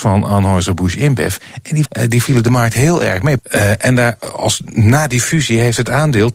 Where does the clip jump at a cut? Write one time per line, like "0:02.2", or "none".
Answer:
0:01.9
0:03.4